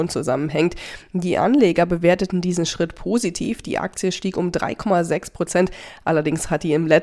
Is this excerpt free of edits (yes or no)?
yes